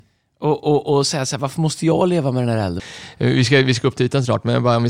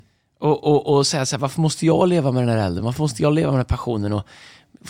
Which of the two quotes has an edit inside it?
first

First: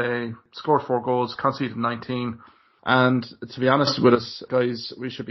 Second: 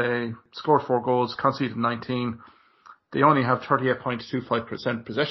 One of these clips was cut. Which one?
first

